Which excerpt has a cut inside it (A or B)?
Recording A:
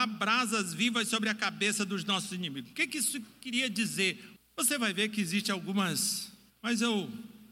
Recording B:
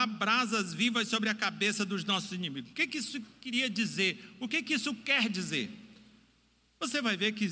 A